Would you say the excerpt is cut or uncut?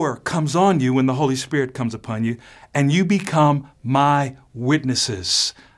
uncut